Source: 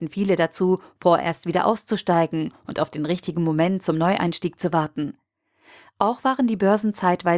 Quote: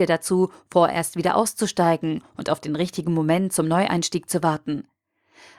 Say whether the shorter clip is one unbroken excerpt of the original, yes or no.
yes